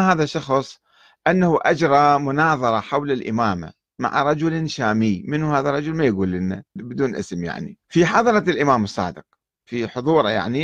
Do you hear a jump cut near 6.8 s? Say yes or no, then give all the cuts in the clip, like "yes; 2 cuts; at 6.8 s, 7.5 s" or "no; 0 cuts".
yes; 2 cuts; at 6.8 s, 7.8 s